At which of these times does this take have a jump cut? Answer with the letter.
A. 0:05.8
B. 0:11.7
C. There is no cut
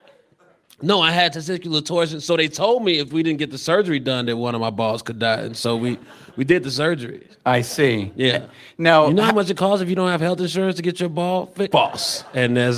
B